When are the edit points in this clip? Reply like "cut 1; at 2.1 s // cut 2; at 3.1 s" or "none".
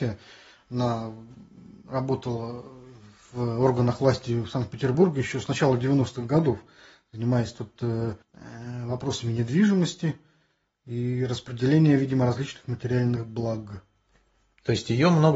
cut 1; at 8.2 s

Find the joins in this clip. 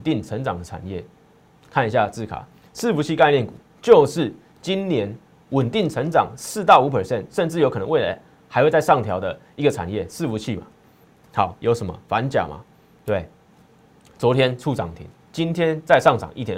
none

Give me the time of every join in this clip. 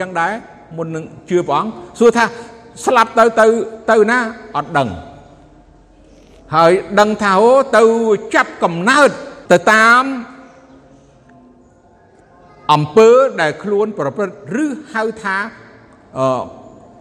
cut 1; at 9.4 s

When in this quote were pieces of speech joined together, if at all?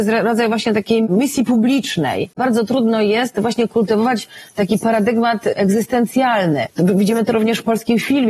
cut 1; at 2.3 s // cut 2; at 6.7 s

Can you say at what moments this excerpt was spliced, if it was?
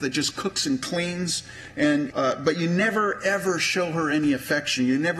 cut 1; at 2.1 s

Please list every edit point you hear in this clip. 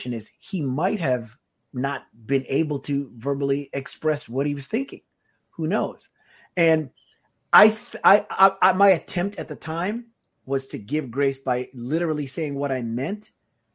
none

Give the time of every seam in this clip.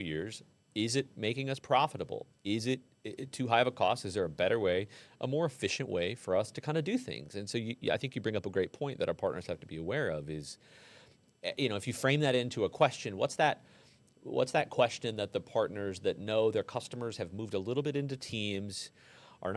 none

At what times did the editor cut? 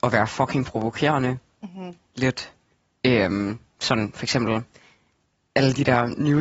none

